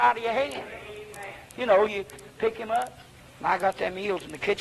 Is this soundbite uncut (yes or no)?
no